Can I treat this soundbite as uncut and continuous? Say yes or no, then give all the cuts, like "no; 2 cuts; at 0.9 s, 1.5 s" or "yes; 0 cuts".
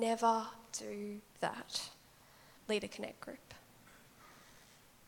no; 1 cut; at 2.6 s